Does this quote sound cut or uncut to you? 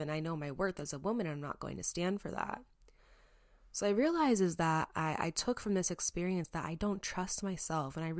uncut